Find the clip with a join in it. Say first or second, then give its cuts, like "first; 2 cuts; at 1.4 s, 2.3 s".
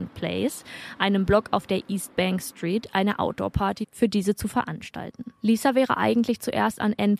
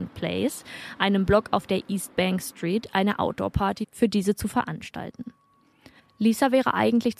first; 1 cut; at 5.4 s